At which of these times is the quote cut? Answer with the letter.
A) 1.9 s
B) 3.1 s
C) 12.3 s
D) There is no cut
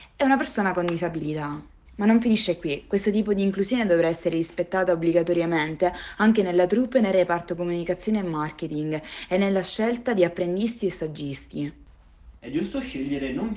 C